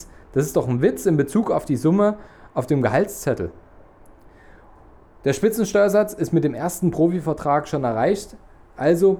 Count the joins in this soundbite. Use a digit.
0